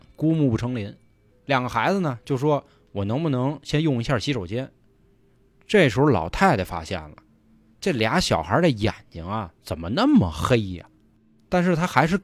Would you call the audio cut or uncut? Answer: cut